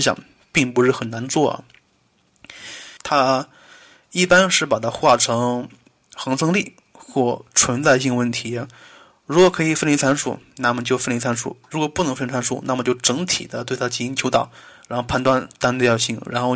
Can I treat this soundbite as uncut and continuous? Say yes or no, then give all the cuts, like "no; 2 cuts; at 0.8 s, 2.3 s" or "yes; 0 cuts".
no; 1 cut; at 3.0 s